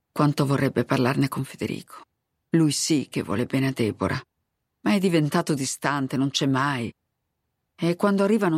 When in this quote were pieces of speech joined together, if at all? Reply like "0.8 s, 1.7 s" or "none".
none